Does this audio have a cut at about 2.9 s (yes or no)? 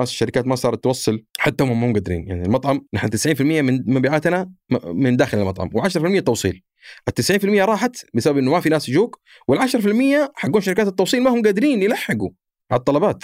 yes